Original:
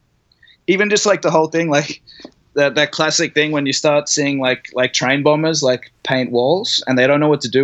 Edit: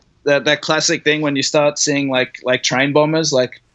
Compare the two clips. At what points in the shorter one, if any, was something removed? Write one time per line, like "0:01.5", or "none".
none